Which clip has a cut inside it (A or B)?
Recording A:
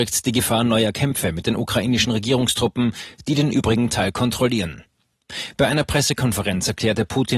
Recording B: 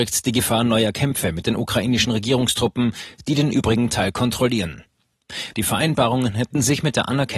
B